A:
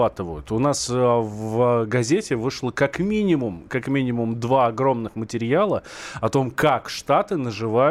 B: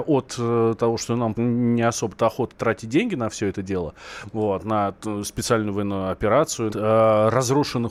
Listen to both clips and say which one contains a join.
B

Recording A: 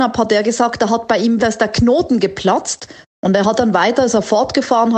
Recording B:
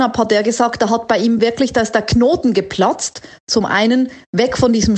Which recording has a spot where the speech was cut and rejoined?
A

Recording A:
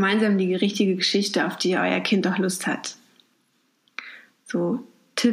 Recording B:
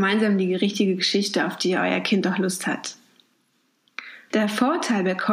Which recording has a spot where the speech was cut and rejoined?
B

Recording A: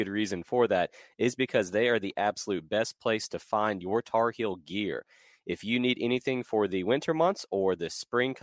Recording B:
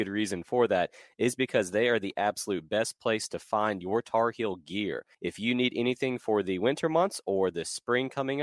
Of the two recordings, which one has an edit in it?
B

